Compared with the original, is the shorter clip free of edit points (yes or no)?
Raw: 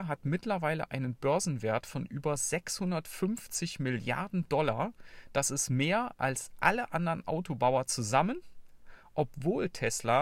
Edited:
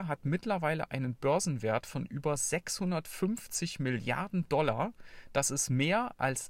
yes